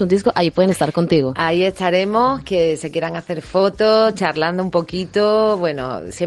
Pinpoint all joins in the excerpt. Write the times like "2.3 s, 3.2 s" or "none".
none